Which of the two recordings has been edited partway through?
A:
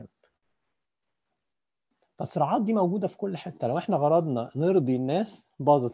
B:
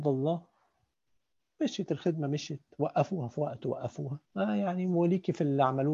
B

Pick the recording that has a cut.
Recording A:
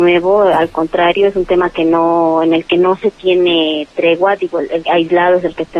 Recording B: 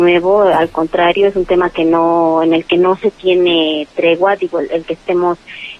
A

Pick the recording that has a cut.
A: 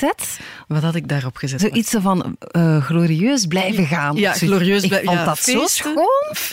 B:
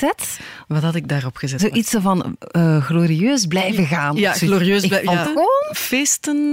B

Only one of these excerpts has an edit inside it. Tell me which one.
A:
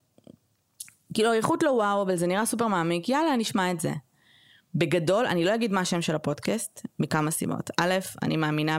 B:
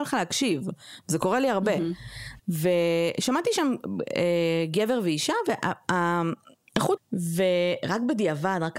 B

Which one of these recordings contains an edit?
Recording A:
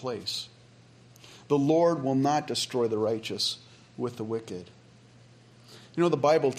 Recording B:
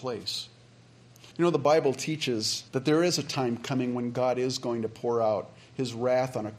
B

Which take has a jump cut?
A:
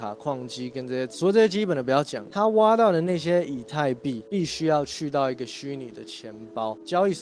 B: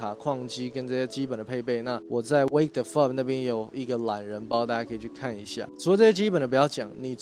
A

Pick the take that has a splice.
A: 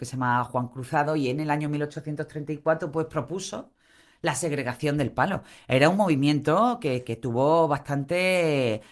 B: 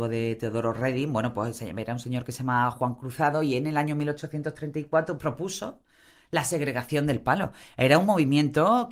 B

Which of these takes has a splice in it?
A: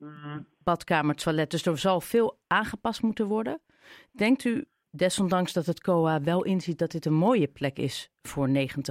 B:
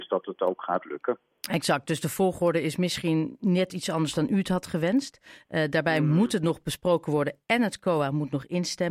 A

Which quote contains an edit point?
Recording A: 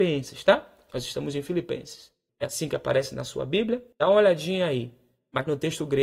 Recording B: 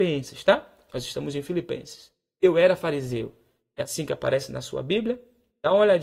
A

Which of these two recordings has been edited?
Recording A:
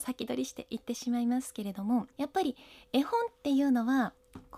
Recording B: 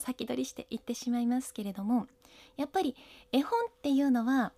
A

